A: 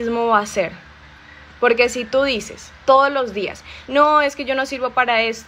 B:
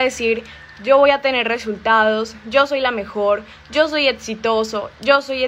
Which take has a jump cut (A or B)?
A